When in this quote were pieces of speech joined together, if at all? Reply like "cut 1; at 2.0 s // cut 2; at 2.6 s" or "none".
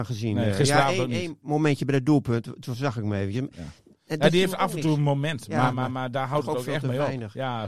none